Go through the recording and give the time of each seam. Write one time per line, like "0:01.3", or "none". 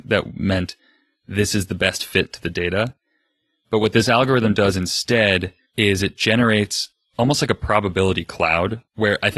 none